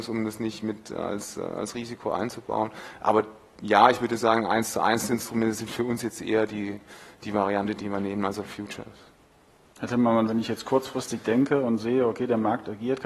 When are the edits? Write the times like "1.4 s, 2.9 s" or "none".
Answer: none